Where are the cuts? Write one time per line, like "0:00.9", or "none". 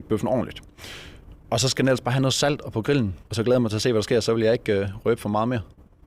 0:03.2